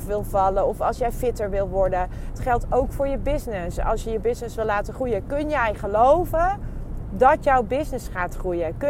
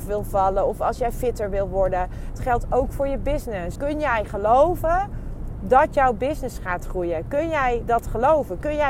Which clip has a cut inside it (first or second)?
second